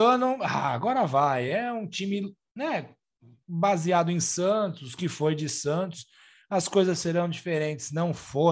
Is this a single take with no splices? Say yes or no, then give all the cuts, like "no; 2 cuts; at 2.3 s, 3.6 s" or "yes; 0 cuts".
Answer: yes; 0 cuts